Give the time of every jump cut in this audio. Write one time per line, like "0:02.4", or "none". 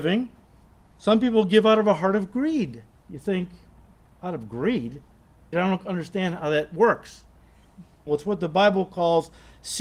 0:05.5
0:08.1